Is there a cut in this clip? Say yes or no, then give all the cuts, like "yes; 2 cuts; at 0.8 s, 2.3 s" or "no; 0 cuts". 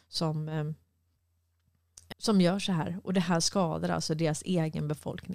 yes; 1 cut; at 2.1 s